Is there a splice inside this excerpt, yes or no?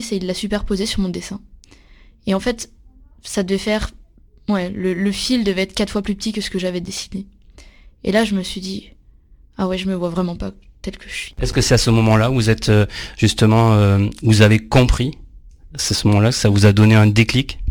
no